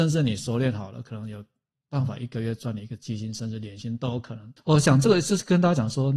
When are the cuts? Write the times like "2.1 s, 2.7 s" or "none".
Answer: 4.6 s